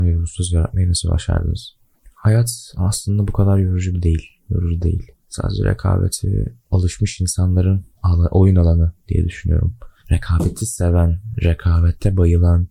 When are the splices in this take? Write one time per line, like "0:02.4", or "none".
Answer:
none